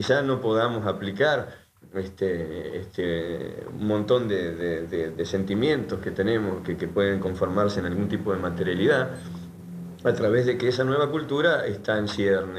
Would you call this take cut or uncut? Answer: uncut